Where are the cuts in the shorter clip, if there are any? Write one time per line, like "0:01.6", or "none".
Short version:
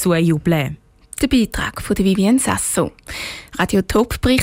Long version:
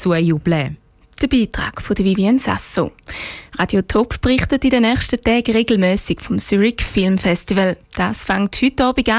none